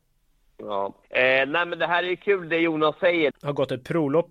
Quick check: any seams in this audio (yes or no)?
yes